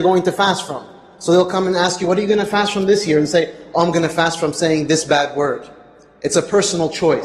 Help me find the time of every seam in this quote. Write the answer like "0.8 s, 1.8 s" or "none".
none